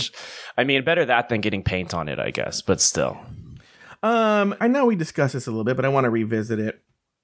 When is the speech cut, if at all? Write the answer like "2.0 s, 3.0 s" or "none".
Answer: 4.6 s